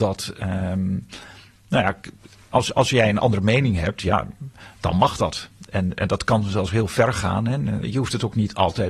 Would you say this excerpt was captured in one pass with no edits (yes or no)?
no